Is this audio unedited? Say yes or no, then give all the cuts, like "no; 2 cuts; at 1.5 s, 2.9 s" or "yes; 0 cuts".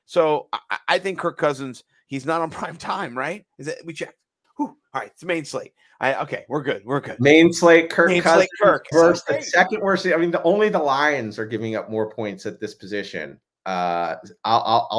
no; 2 cuts; at 4.4 s, 8.9 s